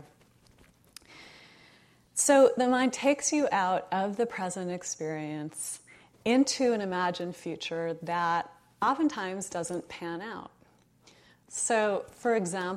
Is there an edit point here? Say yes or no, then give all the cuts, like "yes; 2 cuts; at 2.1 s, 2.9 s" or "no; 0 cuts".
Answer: no; 0 cuts